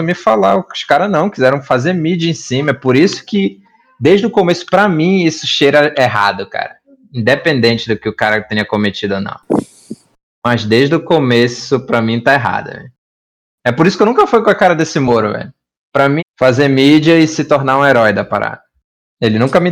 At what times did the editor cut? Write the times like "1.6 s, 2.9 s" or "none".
16.2 s